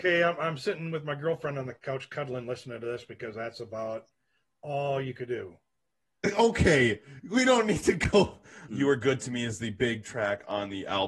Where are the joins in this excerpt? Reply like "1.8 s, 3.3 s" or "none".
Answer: 8.7 s